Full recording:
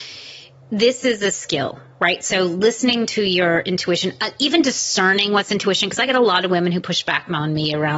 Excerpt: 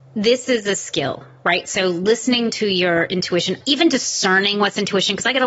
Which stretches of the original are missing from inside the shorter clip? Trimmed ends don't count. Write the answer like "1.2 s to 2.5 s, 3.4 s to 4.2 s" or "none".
4.2 s to 4.3 s